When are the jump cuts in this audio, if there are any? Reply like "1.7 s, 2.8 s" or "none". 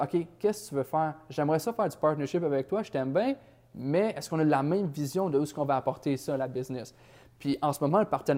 none